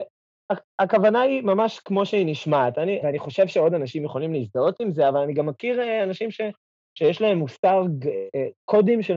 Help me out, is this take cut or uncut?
cut